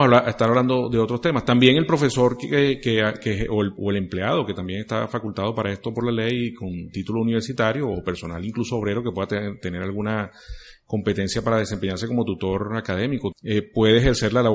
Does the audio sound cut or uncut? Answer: cut